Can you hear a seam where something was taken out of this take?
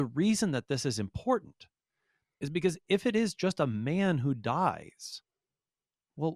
no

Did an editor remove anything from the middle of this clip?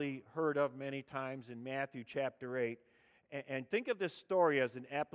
no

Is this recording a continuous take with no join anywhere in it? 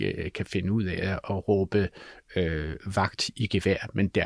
yes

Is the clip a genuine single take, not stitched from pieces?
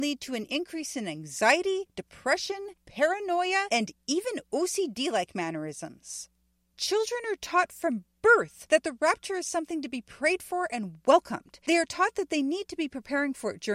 yes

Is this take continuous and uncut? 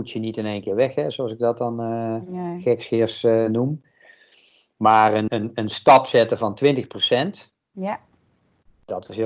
no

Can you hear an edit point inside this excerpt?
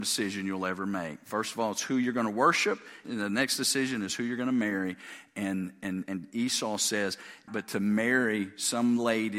yes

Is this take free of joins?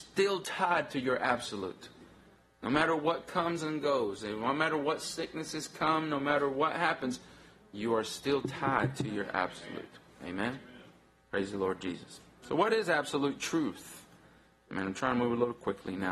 yes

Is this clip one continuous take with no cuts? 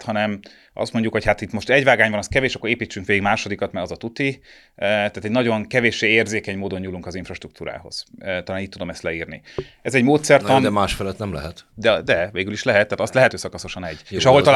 no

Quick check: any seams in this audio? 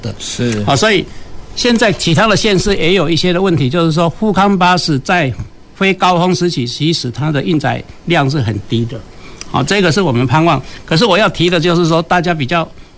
no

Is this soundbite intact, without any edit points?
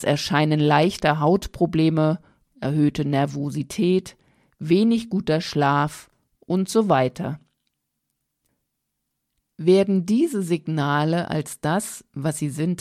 no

